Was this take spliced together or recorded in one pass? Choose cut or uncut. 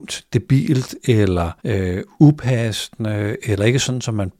cut